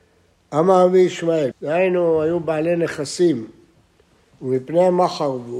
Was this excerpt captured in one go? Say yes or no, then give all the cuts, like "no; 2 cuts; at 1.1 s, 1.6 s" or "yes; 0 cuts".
no; 1 cut; at 1.5 s